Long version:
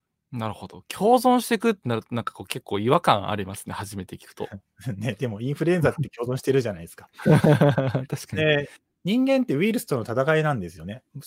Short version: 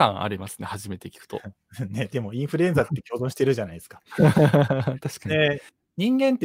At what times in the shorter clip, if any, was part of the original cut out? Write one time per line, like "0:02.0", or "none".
none